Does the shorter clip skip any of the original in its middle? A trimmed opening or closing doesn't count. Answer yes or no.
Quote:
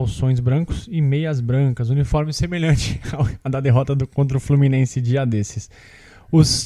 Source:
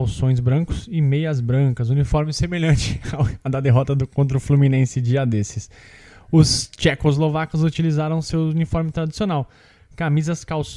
no